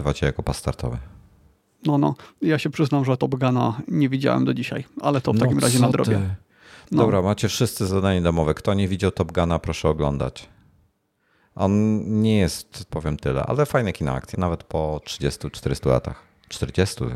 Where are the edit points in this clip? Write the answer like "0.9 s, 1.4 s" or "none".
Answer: 12.9 s, 14.3 s